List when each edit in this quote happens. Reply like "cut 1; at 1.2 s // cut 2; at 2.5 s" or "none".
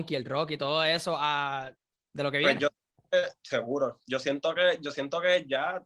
cut 1; at 2.0 s